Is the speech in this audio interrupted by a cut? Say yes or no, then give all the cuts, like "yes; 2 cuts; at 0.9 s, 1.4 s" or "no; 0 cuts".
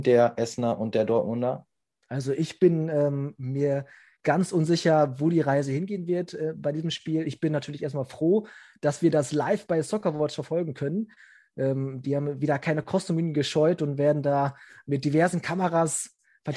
no; 0 cuts